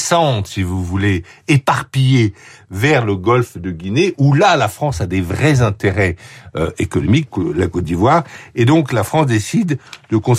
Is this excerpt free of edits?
no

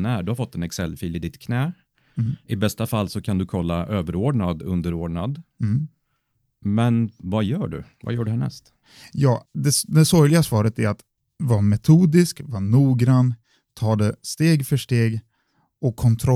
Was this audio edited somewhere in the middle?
yes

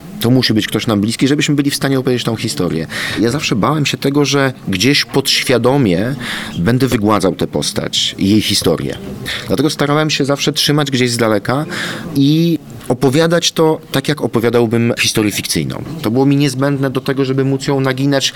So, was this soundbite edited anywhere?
no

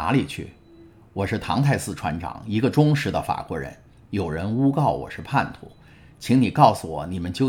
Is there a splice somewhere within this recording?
no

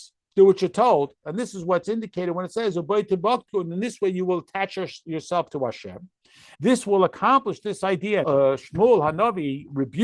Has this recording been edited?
yes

